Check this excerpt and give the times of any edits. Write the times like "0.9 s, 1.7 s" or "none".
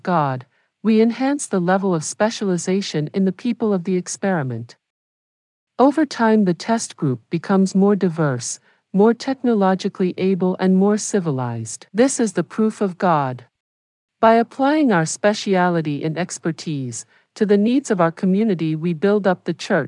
11.9 s, 14.0 s